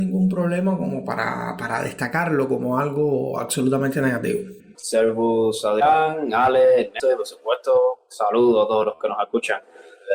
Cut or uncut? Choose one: cut